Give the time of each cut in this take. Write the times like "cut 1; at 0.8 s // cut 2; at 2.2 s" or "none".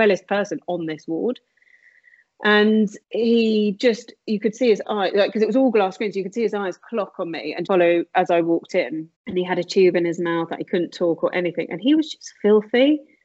cut 1; at 3.0 s // cut 2; at 7.7 s // cut 3; at 9.1 s